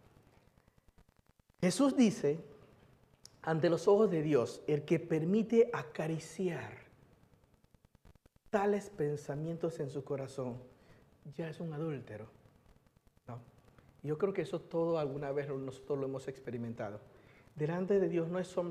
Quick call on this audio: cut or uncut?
uncut